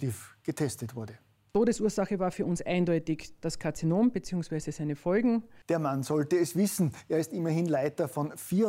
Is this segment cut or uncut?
cut